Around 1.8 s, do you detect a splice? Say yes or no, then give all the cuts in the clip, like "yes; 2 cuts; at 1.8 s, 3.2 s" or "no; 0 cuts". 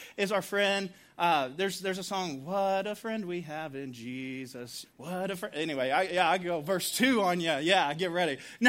no; 1 cut; at 4.8 s